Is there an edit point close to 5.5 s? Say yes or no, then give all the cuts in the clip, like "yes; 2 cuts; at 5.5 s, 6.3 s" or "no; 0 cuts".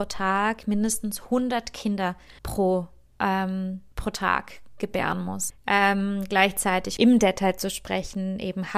yes; 3 cuts; at 2.4 s, 5.5 s, 7.0 s